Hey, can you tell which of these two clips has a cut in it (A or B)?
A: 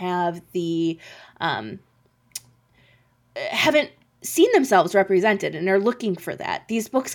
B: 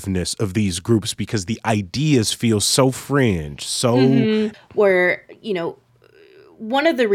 B